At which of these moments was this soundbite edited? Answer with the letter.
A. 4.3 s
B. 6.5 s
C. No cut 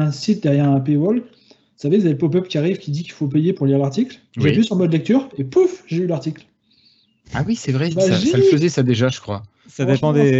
A